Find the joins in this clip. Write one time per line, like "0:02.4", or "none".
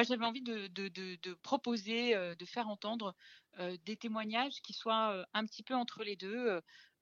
0:01.4